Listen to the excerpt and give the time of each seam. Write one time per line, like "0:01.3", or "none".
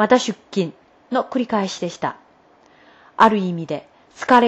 none